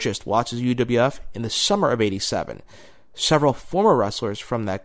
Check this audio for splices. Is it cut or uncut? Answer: uncut